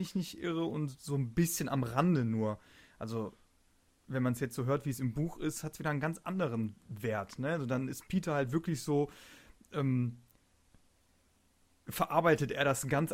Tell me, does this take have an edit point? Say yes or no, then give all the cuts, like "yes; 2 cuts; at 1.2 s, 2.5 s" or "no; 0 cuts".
no; 0 cuts